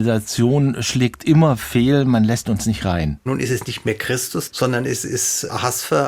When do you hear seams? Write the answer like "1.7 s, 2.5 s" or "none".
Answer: 3.3 s, 4.5 s